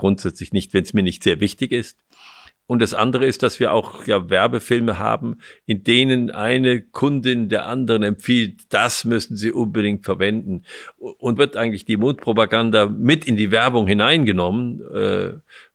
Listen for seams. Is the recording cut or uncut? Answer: cut